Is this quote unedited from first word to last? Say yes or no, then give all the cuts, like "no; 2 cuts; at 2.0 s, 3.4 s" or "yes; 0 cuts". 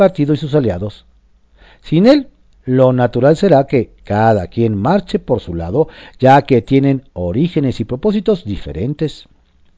yes; 0 cuts